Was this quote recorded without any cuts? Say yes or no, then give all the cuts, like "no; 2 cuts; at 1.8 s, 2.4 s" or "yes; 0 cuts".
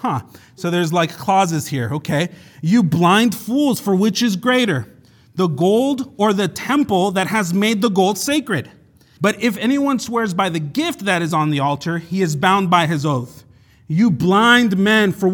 no; 1 cut; at 9.2 s